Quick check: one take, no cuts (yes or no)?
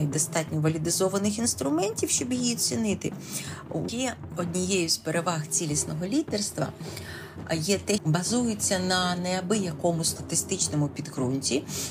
no